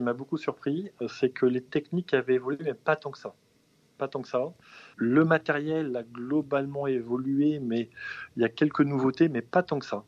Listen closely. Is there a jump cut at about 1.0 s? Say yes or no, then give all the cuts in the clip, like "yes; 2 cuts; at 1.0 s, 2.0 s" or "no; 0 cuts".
no; 1 cut; at 4.9 s